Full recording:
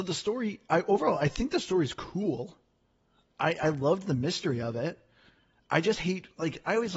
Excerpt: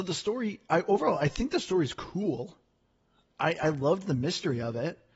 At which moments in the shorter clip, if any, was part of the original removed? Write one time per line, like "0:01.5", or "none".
none